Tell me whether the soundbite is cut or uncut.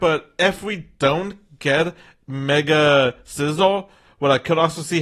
uncut